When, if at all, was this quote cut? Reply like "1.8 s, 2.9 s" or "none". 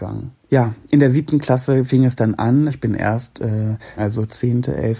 2.7 s, 4.0 s

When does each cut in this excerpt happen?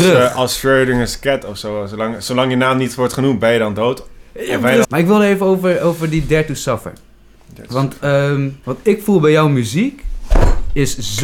4.8 s, 8.6 s

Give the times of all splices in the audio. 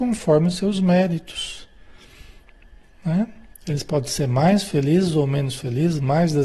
3.5 s

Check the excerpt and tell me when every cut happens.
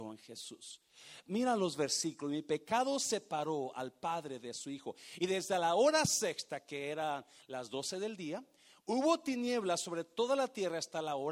none

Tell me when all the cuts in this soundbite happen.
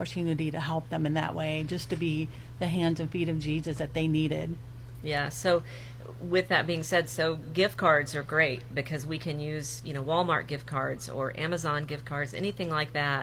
none

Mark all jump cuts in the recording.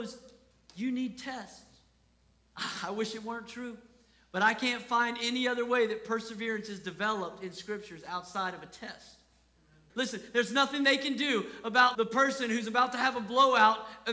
9.9 s, 11.9 s

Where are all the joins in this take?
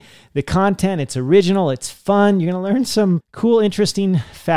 3.2 s

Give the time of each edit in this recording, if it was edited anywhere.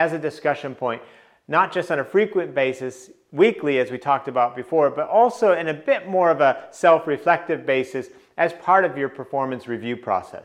none

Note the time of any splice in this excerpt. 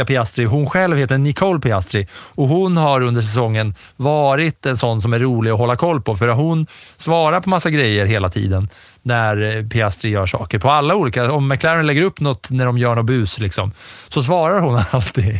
none

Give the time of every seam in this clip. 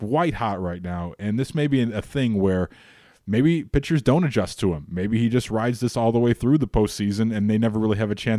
none

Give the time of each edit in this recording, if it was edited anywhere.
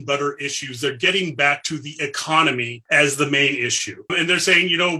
4.1 s

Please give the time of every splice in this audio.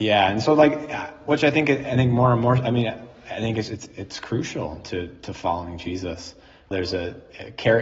3.7 s, 6.7 s

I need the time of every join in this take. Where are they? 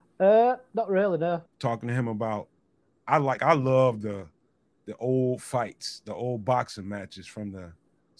1.5 s, 3.4 s

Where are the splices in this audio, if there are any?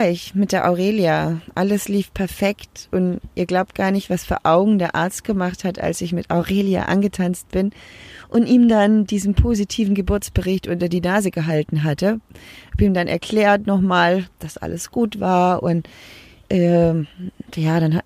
none

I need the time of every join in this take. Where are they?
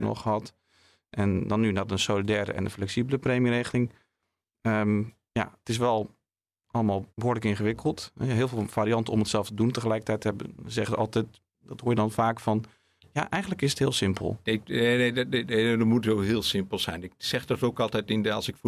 7.1 s, 14.4 s

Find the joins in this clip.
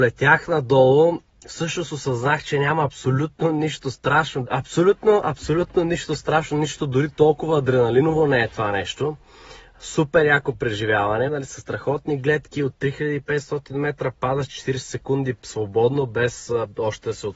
4.5 s, 11.3 s

